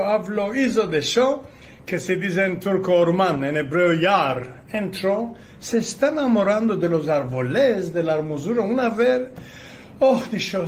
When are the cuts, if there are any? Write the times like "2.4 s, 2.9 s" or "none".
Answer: 1.8 s